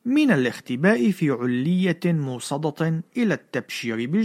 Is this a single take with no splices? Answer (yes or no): yes